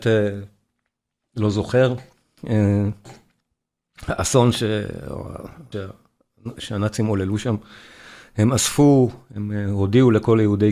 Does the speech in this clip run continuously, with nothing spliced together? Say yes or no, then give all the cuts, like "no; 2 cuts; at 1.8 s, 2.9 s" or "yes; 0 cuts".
no; 1 cut; at 5.7 s